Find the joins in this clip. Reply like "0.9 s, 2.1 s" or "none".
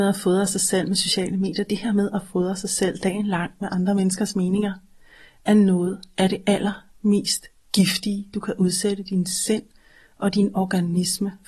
none